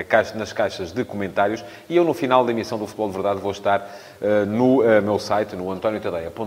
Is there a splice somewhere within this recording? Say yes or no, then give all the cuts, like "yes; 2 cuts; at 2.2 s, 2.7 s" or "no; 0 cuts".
no; 0 cuts